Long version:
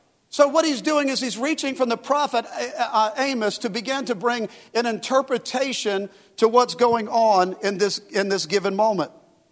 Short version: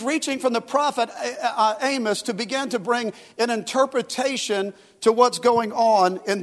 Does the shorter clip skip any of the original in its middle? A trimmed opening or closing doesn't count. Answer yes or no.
no